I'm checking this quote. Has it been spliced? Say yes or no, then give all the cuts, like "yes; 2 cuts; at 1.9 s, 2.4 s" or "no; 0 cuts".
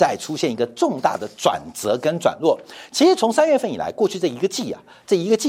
no; 0 cuts